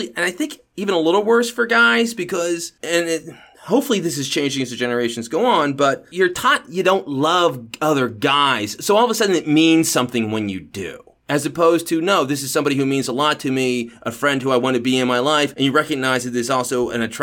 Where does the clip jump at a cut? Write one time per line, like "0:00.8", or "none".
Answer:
none